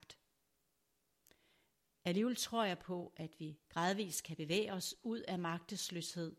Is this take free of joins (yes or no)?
yes